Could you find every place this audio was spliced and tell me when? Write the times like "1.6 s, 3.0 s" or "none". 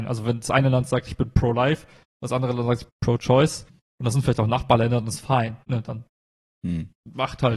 none